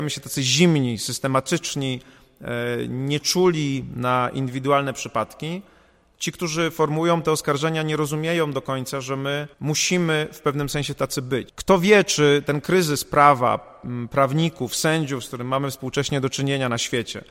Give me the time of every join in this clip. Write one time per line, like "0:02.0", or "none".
0:09.5
0:11.5